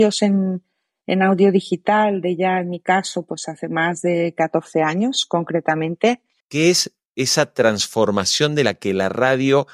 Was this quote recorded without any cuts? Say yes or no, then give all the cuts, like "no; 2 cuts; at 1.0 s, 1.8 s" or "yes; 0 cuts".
no; 1 cut; at 6.4 s